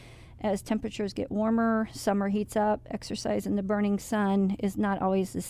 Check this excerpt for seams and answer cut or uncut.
uncut